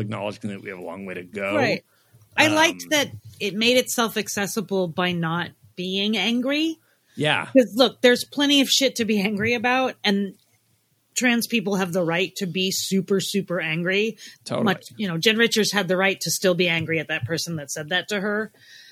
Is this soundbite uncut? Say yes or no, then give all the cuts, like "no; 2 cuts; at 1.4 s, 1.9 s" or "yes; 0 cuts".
yes; 0 cuts